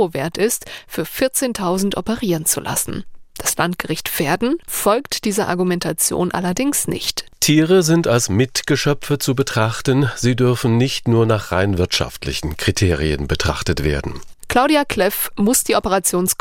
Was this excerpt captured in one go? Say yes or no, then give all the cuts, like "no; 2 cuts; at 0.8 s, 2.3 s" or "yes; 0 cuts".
yes; 0 cuts